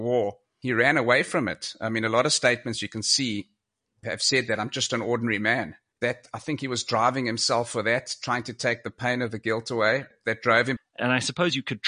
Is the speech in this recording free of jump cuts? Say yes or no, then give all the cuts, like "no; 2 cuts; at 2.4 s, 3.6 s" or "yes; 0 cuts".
no; 2 cuts; at 5.9 s, 10.8 s